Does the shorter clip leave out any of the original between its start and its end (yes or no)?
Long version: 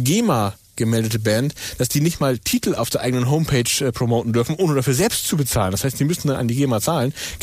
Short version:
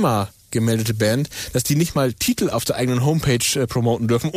no